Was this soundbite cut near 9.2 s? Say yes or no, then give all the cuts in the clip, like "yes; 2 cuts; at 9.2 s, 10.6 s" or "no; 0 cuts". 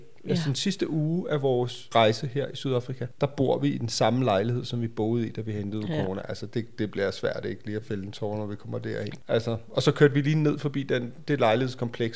yes; 1 cut; at 9.2 s